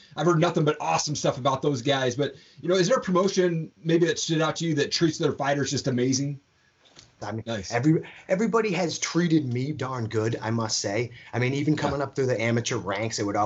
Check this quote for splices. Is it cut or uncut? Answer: cut